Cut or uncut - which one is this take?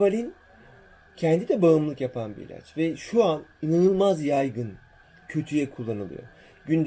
uncut